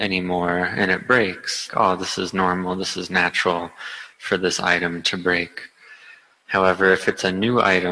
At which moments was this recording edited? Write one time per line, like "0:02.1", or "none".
0:01.7